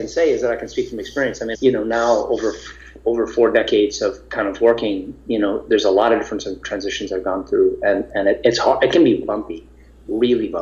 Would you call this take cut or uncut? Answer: cut